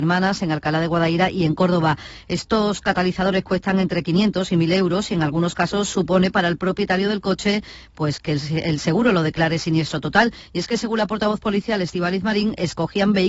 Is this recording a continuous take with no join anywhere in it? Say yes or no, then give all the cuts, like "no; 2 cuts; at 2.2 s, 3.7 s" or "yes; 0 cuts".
yes; 0 cuts